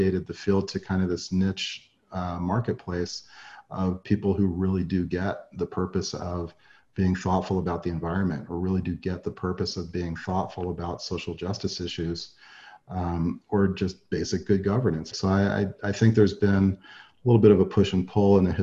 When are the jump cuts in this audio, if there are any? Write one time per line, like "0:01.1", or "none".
0:15.1